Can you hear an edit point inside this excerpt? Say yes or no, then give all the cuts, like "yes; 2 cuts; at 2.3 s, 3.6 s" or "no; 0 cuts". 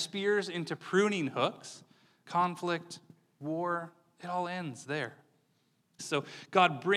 yes; 2 cuts; at 2.2 s, 6.0 s